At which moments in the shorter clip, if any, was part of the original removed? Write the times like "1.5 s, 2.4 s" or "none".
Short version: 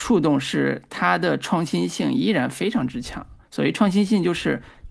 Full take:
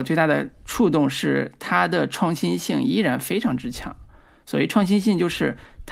3.4 s